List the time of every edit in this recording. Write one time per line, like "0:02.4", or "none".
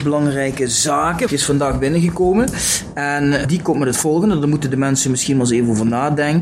0:01.3